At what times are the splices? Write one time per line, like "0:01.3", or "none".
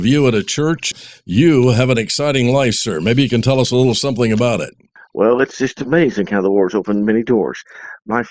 none